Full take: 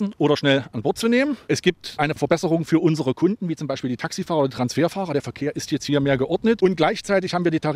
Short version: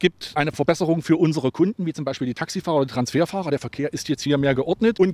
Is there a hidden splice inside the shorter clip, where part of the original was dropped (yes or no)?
no